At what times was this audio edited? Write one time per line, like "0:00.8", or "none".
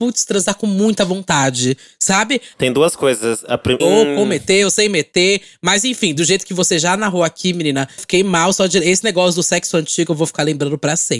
0:02.5
0:03.8
0:08.0